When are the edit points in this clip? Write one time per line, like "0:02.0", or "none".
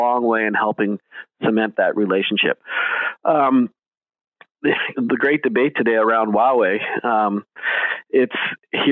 0:04.9